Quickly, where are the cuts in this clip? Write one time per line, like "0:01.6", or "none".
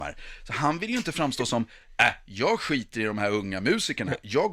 none